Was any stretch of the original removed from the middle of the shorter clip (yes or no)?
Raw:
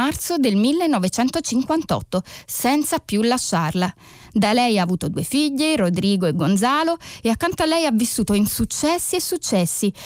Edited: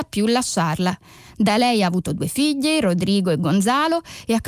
no